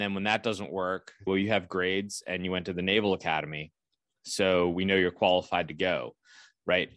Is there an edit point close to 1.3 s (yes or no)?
yes